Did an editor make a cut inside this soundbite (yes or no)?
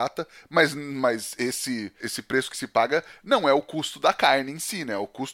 yes